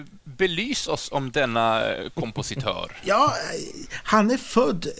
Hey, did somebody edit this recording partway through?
no; 0 cuts

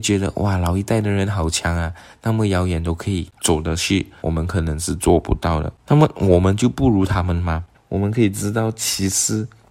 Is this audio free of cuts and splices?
no; 2 cuts; at 4.2 s, 7.7 s

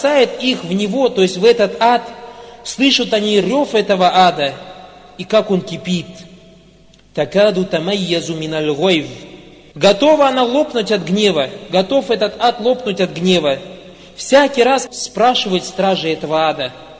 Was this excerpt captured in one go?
no; 2 cuts; at 9.7 s, 14.9 s

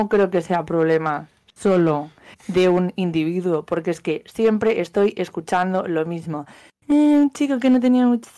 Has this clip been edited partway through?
no; 0 cuts

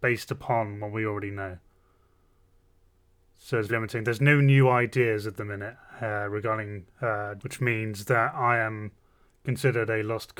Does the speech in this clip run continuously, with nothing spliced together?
no; 2 cuts; at 3.7 s, 7.4 s

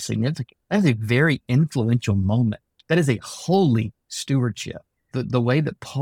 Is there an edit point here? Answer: yes; 1 cut; at 5.1 s

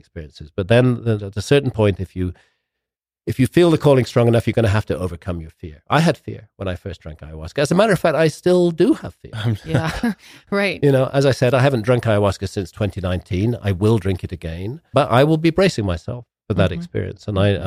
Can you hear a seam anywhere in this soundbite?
yes; 2 cuts; at 1.2 s, 14.9 s

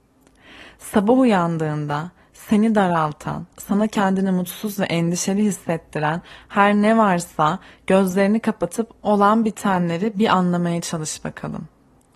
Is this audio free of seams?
no; 1 cut; at 3.5 s

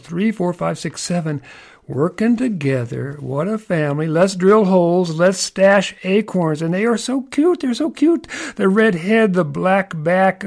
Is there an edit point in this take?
no; 0 cuts

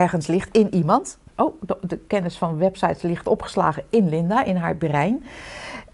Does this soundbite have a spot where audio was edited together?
no; 0 cuts

